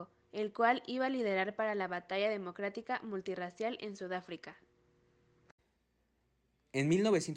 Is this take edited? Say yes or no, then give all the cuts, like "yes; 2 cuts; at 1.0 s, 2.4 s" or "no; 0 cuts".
no; 0 cuts